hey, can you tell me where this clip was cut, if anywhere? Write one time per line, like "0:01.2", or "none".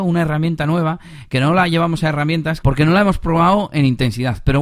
0:02.6